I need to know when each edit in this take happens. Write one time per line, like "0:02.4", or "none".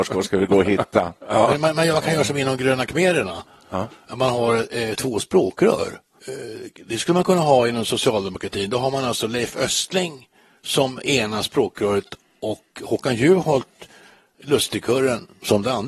0:04.9
0:06.2